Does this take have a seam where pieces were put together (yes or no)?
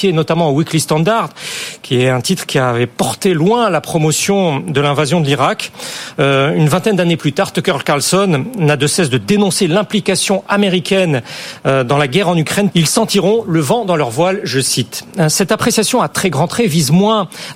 yes